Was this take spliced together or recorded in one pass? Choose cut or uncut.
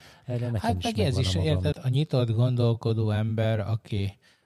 cut